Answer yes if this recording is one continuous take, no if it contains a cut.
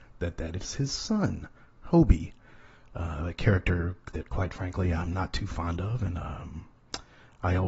yes